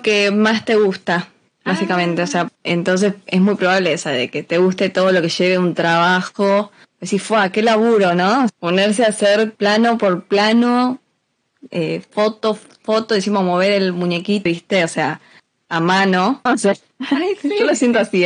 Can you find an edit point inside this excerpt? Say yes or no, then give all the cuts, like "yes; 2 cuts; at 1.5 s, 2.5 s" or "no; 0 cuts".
yes; 2 cuts; at 14.5 s, 16.5 s